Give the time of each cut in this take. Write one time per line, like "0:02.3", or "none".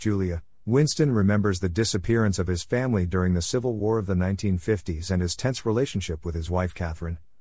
none